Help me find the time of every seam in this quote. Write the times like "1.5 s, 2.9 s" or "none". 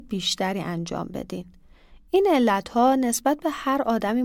none